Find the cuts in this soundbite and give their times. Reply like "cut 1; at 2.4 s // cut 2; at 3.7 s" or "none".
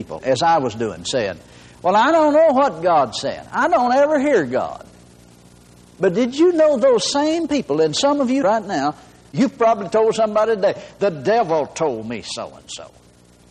none